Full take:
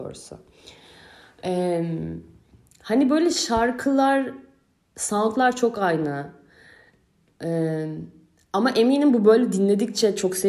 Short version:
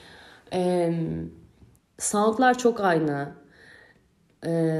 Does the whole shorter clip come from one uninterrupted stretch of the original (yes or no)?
no